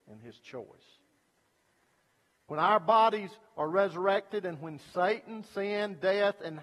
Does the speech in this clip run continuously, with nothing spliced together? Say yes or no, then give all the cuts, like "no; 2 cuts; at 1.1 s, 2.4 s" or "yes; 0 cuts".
yes; 0 cuts